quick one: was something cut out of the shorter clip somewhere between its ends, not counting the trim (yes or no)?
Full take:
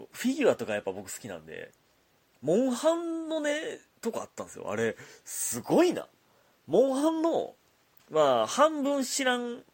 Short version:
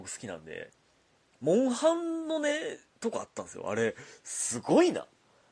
no